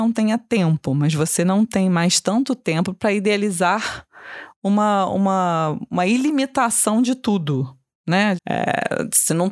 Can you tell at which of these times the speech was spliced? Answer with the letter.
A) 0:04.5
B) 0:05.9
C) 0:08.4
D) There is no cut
C